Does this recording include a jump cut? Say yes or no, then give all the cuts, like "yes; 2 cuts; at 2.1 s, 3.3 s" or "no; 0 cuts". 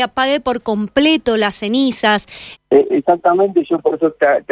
yes; 1 cut; at 2.6 s